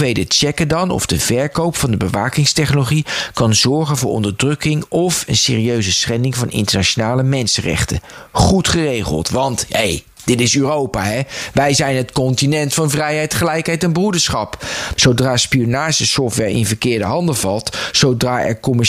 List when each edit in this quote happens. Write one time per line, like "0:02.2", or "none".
0:15.0